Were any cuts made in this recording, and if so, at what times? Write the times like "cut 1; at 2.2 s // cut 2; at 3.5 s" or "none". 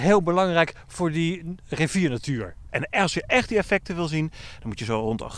cut 1; at 2.7 s